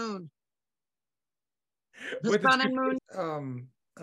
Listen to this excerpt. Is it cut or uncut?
cut